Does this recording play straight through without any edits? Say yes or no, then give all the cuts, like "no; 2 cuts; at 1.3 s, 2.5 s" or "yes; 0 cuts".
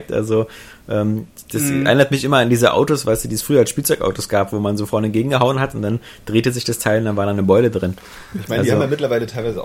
yes; 0 cuts